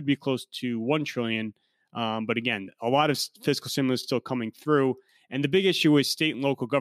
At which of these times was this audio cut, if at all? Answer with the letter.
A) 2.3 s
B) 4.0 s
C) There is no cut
C